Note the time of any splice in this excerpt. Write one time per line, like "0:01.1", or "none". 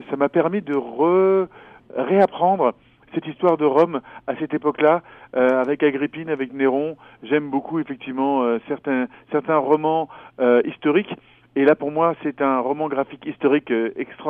0:07.1